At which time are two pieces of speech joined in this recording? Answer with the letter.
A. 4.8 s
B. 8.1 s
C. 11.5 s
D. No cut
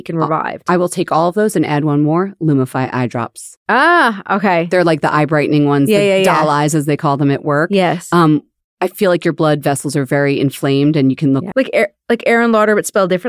C